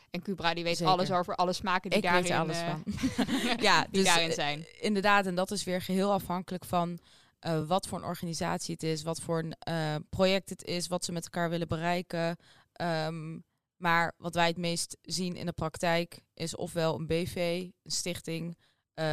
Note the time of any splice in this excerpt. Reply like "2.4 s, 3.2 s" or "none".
none